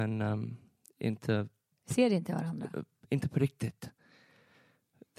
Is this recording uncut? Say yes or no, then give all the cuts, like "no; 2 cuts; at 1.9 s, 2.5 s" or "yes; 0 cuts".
yes; 0 cuts